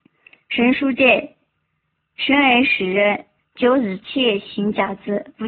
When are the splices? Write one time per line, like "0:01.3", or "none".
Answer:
0:03.4